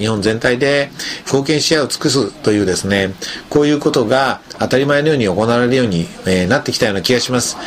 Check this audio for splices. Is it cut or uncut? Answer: cut